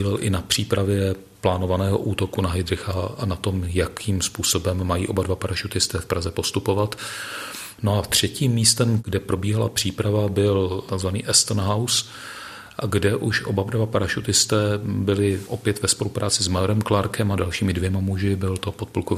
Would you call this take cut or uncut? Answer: cut